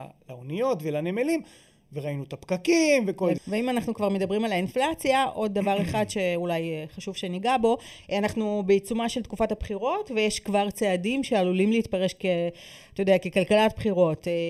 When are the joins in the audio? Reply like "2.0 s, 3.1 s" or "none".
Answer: 3.4 s